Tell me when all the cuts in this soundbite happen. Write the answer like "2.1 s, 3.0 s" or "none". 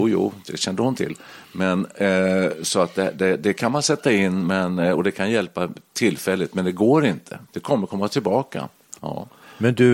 7.5 s, 9.0 s